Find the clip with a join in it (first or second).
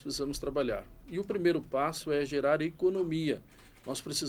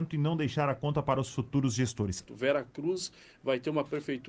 second